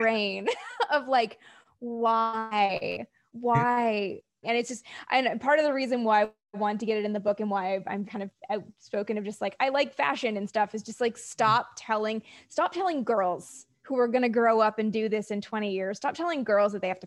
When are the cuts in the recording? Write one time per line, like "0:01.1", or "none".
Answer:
0:04.4
0:08.0

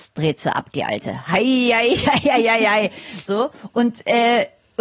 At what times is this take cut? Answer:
none

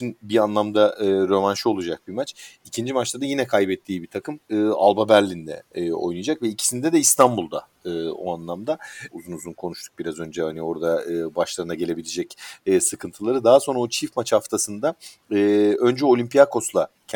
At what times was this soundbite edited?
0:09.1

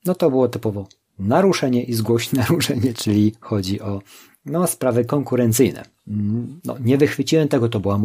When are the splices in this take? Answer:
0:02.9
0:06.6

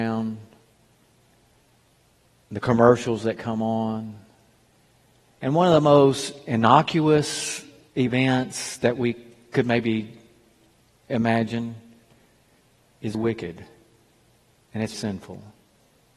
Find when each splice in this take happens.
0:13.1
0:14.9

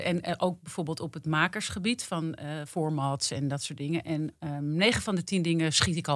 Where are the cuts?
none

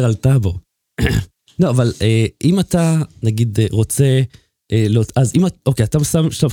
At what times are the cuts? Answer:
none

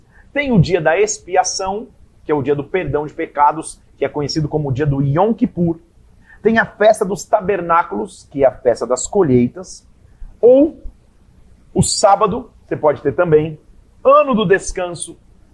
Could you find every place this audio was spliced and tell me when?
none

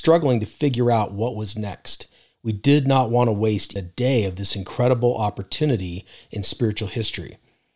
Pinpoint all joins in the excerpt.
0:03.8

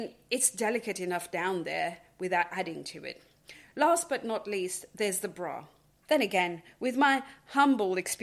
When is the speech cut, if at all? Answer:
0:06.0

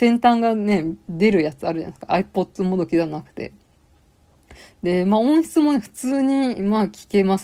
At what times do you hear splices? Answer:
0:02.1

